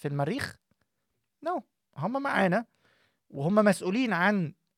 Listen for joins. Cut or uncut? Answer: uncut